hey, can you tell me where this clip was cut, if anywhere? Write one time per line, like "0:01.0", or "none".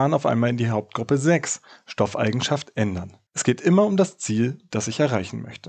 0:03.3